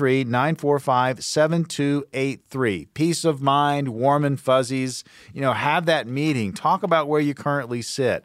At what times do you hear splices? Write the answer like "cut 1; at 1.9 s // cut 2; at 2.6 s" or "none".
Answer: none